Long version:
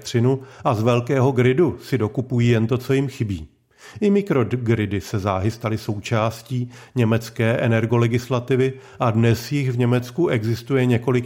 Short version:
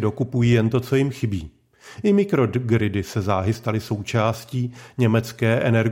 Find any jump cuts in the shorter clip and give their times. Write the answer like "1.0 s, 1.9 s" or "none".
none